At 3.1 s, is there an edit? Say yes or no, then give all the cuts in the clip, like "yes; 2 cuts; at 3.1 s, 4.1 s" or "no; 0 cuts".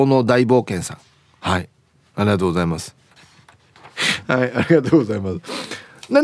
yes; 1 cut; at 3.1 s